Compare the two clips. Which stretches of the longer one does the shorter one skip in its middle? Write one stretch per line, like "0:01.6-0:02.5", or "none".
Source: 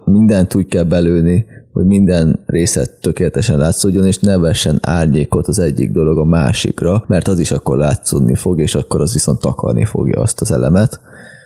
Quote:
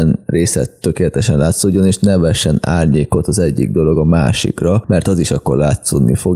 none